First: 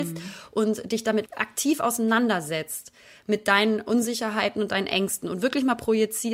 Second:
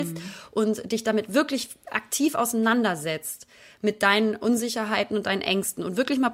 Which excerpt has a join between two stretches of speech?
first; 1 cut; at 1.3 s

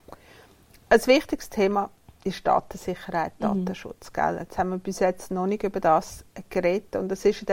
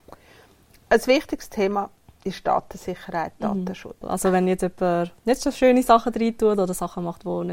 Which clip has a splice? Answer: second; 2 cuts; at 4.0 s, 5.2 s

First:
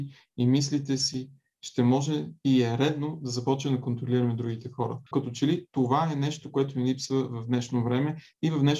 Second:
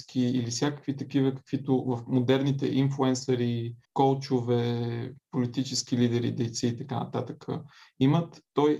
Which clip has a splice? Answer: first; 1 cut; at 5.1 s

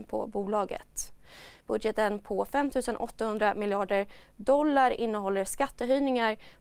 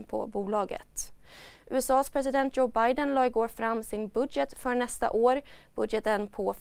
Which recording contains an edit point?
first; 1 cut; at 1.6 s

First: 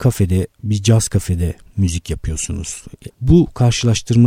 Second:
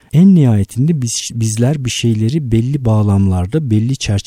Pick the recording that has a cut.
first; 1 cut; at 3.1 s

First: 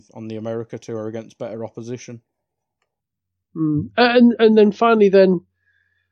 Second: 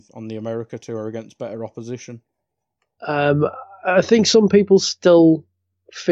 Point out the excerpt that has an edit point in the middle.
second; 1 cut; at 3.0 s

